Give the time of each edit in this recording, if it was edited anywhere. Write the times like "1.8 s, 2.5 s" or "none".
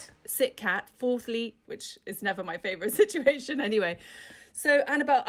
1.6 s